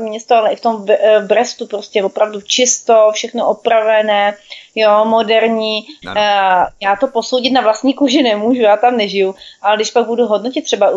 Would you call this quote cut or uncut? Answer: cut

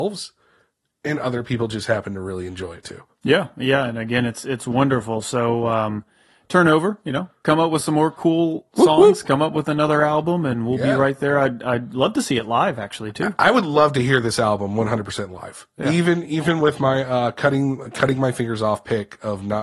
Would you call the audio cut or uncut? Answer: uncut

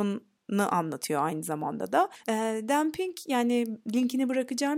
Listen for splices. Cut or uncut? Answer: uncut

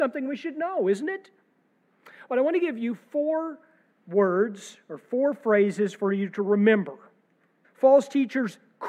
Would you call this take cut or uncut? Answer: cut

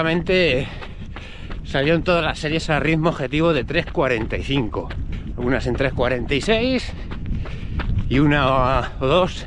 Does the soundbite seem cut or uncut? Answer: uncut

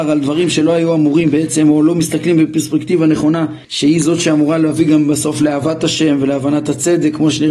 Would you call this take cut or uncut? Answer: cut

